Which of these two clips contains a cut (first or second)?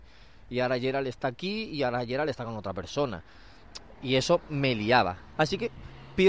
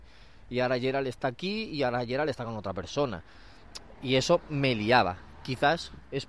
first